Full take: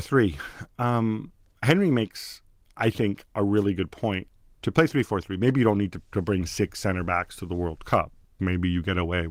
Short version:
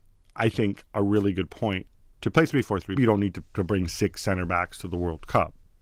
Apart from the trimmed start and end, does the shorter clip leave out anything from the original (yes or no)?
yes